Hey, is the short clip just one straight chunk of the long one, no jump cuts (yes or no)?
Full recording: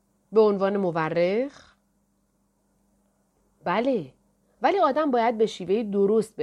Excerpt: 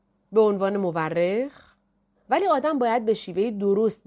no